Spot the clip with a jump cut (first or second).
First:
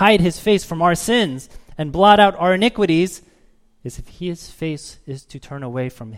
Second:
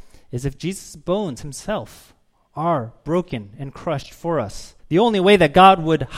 second